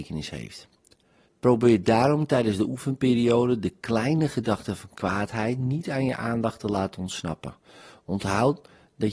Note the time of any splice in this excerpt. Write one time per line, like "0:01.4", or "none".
0:01.2